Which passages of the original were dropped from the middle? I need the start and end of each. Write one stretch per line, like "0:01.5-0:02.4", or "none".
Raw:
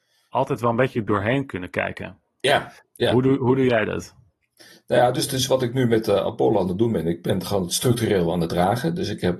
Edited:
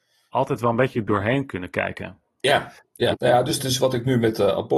0:03.1-0:04.8